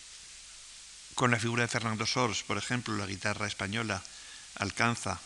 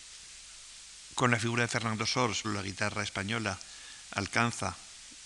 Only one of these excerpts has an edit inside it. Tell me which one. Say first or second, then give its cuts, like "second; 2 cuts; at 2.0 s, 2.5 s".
second; 1 cut; at 2.4 s